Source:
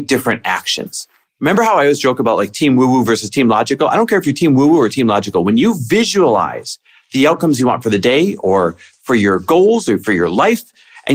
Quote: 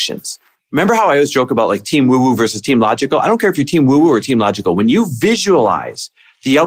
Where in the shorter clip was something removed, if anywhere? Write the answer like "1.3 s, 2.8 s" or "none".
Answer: none